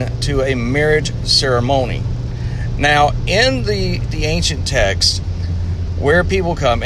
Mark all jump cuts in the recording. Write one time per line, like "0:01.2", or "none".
none